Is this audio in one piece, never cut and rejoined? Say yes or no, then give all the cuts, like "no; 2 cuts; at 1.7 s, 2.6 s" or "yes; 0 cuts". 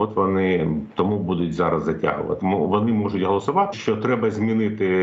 no; 2 cuts; at 2.4 s, 3.7 s